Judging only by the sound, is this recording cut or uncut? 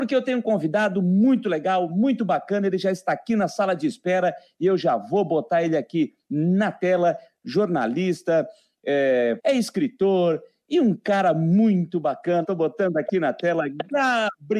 cut